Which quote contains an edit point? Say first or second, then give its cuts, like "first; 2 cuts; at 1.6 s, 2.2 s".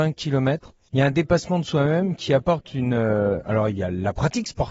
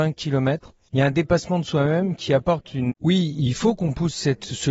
second; 1 cut; at 2.9 s